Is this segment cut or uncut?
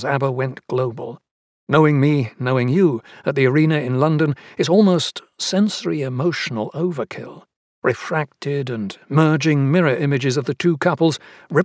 uncut